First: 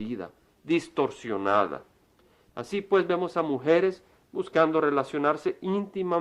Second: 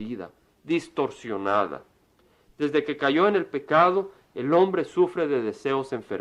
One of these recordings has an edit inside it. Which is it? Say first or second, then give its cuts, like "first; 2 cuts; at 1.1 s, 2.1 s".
first; 1 cut; at 2.5 s